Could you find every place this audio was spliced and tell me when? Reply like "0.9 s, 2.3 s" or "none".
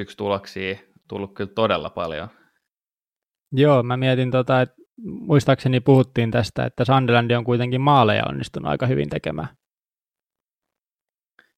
none